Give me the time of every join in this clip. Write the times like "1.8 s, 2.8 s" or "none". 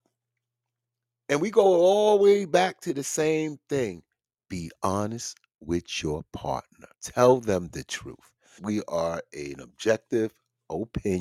6.9 s, 8.6 s